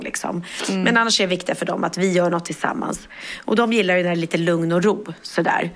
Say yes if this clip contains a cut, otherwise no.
no